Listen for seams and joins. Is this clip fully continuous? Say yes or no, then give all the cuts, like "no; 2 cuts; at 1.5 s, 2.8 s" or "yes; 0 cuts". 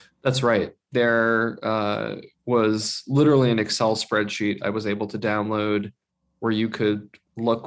yes; 0 cuts